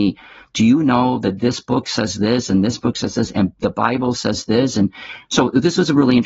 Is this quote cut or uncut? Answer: uncut